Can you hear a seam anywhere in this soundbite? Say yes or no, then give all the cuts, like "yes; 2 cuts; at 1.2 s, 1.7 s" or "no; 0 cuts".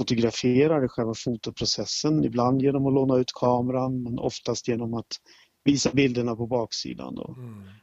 no; 0 cuts